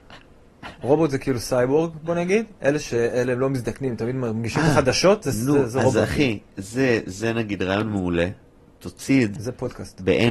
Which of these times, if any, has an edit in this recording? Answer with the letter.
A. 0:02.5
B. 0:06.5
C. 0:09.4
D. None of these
C